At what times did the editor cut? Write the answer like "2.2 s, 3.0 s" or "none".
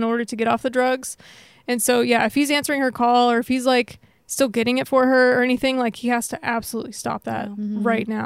none